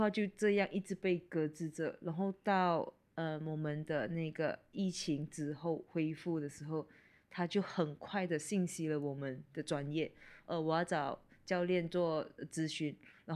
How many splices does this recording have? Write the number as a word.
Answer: zero